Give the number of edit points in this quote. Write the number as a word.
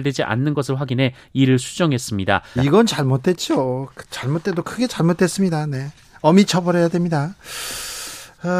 one